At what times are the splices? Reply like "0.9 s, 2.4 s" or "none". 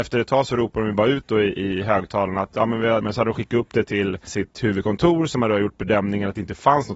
3.0 s, 4.3 s